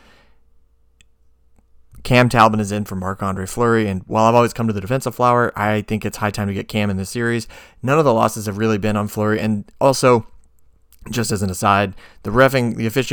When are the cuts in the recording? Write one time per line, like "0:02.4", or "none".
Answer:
none